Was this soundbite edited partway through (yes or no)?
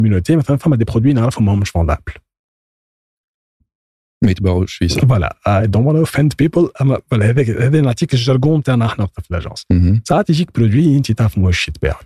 no